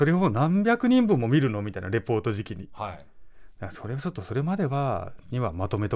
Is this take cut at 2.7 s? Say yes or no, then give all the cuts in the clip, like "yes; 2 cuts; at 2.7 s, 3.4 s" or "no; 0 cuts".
no; 0 cuts